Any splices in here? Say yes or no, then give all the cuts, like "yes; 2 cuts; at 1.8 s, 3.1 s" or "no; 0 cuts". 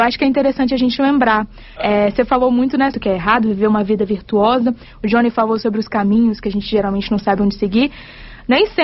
yes; 2 cuts; at 1.8 s, 2.9 s